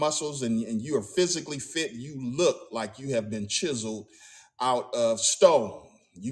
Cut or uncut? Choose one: uncut